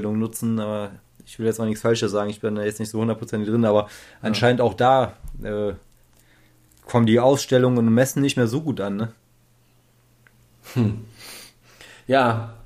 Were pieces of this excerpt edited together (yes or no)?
no